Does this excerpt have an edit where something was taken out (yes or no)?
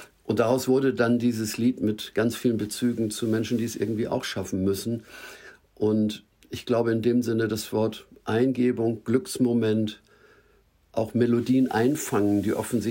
no